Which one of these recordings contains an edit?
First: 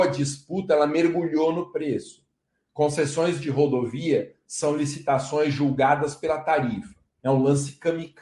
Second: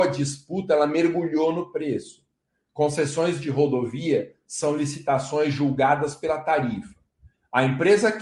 first; 1 cut; at 7.2 s

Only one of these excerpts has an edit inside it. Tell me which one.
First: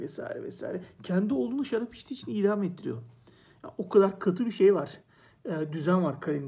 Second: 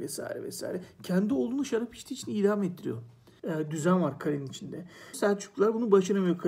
second; 2 cuts; at 3.4 s, 5.1 s

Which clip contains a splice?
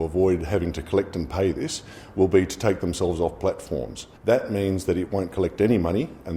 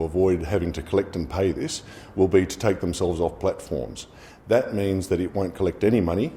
first; 1 cut; at 4.2 s

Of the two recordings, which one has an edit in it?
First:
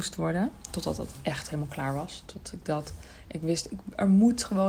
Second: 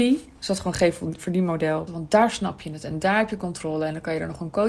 second; 1 cut; at 1.9 s

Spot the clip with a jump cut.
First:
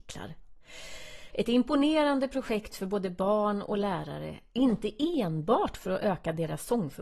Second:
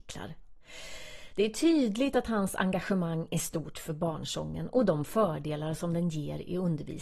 first; 1 cut; at 1.3 s

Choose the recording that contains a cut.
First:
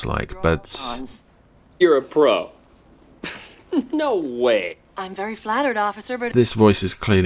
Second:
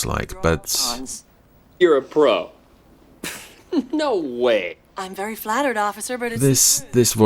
first; 1 cut; at 6.3 s

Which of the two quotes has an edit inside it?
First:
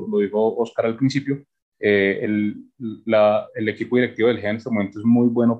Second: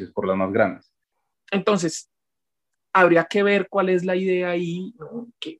second; 1 cut; at 1.3 s

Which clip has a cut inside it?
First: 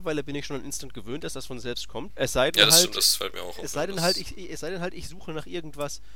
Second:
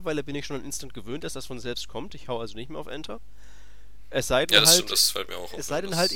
first; 1 cut; at 2.1 s

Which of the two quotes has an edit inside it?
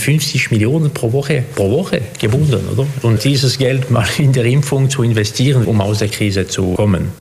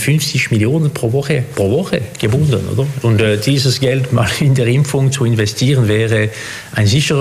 first; 2 cuts; at 3.2 s, 5.6 s

